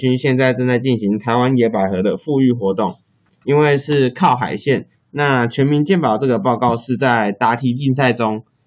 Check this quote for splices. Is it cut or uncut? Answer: cut